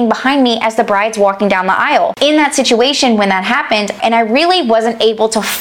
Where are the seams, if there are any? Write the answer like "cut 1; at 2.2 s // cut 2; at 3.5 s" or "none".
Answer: cut 1; at 4.0 s